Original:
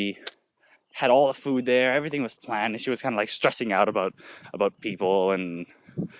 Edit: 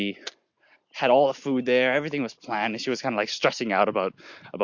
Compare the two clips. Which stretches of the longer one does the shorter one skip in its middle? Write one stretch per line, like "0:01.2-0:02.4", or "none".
none